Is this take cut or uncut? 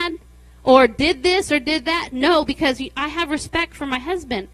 uncut